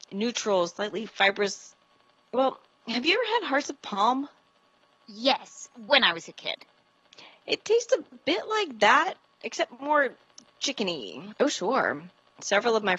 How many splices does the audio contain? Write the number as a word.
two